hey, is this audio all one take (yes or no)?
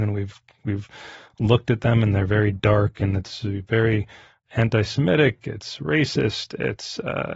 yes